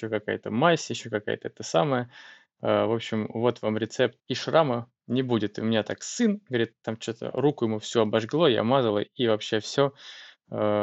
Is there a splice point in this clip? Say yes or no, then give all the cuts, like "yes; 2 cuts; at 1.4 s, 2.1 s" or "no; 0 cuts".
yes; 1 cut; at 4.2 s